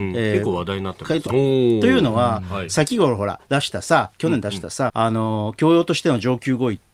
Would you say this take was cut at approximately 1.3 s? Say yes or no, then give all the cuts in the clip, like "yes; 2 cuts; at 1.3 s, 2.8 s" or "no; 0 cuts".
yes; 2 cuts; at 1.3 s, 4.9 s